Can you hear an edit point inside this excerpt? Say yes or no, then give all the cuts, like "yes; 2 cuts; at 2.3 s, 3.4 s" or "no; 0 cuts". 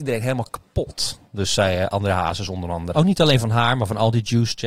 yes; 1 cut; at 2.9 s